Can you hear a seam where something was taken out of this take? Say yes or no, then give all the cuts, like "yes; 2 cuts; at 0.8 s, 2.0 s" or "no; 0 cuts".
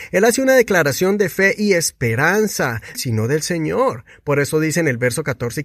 yes; 1 cut; at 2.9 s